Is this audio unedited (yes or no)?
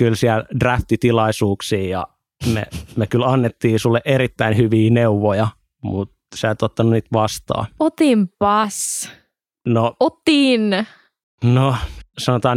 yes